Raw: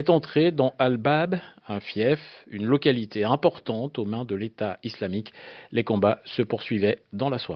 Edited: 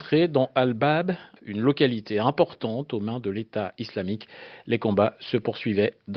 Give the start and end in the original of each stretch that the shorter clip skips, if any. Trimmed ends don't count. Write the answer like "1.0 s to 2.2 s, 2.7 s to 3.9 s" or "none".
1.6 s to 2.4 s

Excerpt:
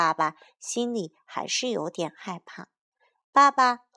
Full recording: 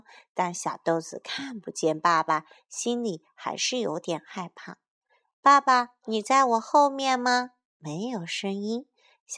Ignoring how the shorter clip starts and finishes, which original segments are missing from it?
none

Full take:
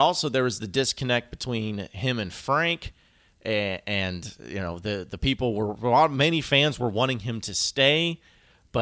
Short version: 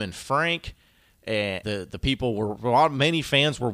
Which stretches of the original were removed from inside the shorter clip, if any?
3.8 s to 4.8 s

